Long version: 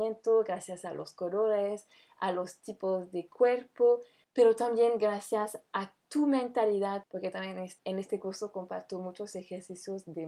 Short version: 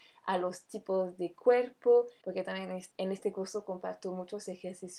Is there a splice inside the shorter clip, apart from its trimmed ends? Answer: yes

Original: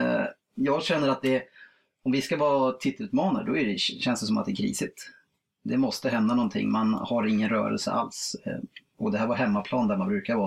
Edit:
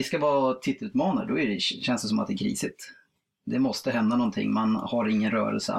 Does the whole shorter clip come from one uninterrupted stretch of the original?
yes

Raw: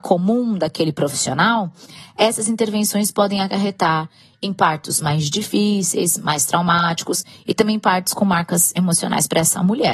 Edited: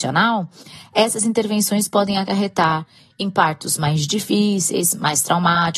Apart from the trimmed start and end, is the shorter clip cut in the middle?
no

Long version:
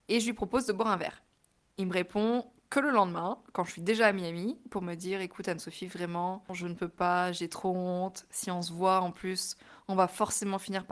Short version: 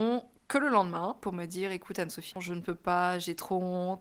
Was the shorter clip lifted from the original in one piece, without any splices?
no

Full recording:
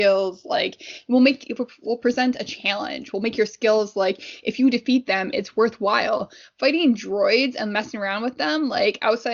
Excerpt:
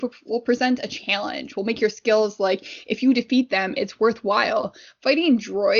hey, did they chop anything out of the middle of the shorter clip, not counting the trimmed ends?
no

